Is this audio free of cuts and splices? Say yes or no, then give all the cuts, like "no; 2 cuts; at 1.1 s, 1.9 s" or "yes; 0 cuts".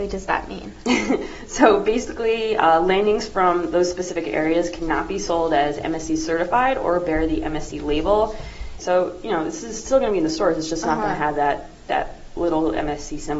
no; 1 cut; at 8.8 s